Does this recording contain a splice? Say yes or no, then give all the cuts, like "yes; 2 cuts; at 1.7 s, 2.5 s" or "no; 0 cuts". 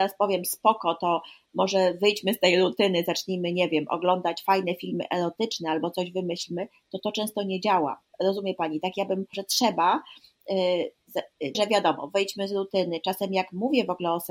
yes; 2 cuts; at 9.3 s, 11.5 s